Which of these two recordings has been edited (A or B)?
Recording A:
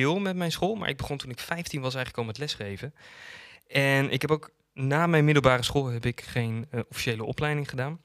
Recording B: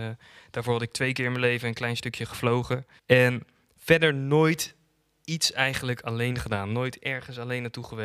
B